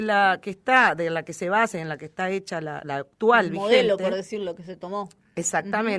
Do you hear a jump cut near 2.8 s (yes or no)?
yes